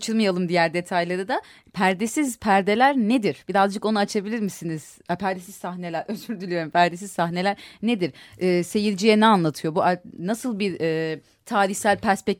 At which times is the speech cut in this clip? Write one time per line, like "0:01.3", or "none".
none